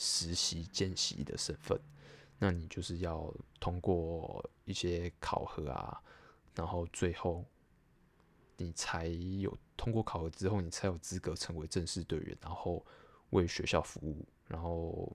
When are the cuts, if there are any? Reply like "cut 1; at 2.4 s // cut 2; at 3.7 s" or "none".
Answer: none